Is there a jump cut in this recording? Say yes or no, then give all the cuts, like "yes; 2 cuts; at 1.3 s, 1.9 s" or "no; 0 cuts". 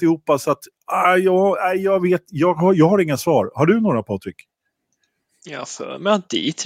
no; 0 cuts